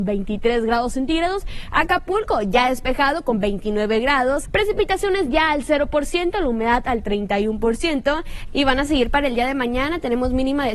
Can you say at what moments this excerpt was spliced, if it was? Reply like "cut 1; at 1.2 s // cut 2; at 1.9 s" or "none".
cut 1; at 1.7 s // cut 2; at 4.4 s // cut 3; at 8.5 s